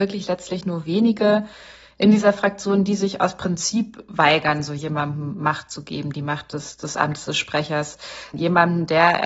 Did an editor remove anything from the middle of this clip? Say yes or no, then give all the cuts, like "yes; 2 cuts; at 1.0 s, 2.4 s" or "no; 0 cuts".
no; 0 cuts